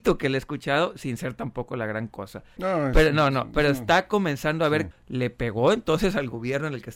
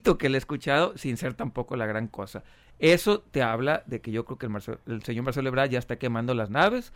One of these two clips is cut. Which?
first; 2 cuts; at 2.6 s, 4.9 s

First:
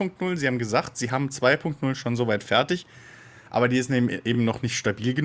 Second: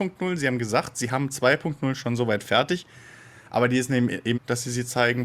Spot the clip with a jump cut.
second; 1 cut; at 4.3 s

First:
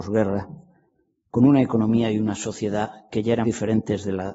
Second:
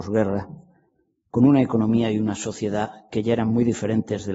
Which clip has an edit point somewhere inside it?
first; 1 cut; at 3.4 s

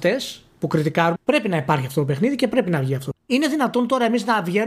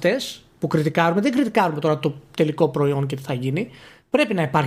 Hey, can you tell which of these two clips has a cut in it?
first; 2 cuts; at 1.2 s, 3.1 s

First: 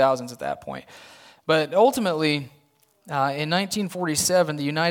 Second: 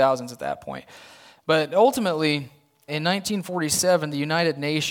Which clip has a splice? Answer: second; 1 cut; at 2.9 s

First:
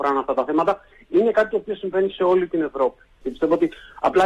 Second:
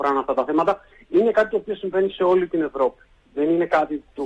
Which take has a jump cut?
first; 1 cut; at 3.2 s

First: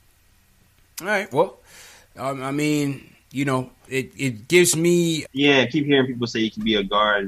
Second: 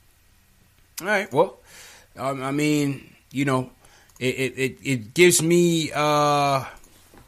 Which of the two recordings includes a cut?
first; 2 cuts; at 3.9 s, 5.2 s

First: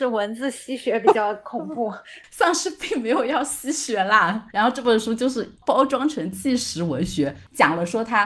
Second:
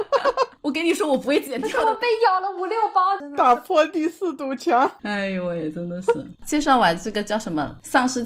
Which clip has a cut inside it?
first; 1 cut; at 4.5 s

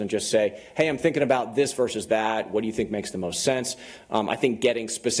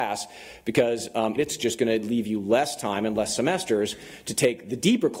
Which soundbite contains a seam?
second; 1 cut; at 1.4 s

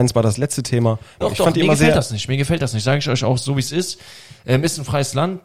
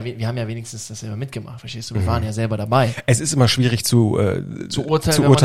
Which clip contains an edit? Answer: first; 1 cut; at 1.2 s

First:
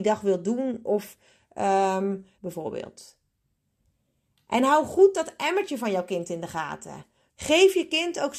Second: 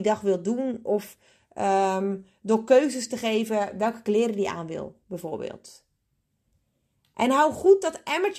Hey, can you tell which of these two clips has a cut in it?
first; 2 cuts; at 2.4 s, 7.3 s

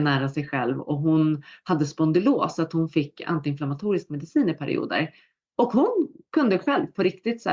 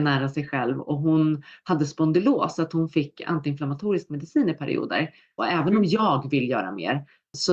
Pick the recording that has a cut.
second; 1 cut; at 5.4 s

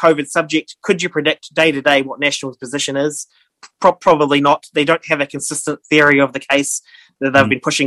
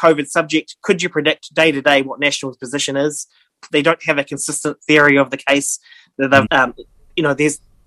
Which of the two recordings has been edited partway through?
second; 2 cuts; at 3.7 s, 6.5 s

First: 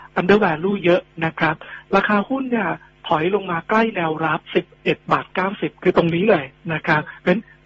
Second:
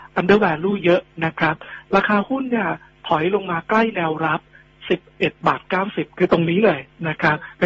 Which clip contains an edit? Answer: first; 1 cut; at 4.4 s

